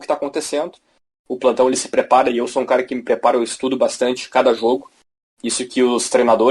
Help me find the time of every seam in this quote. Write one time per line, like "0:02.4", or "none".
none